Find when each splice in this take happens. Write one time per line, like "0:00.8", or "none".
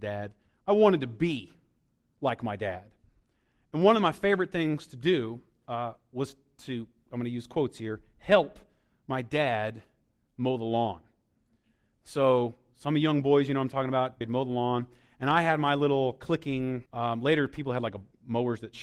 0:14.2
0:16.9